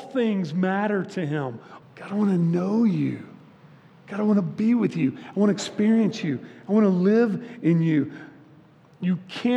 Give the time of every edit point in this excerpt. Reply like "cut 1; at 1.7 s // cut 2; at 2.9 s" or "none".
cut 1; at 1.8 s